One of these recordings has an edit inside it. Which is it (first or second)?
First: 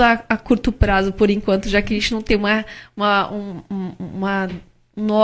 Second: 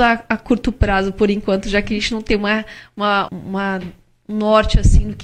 second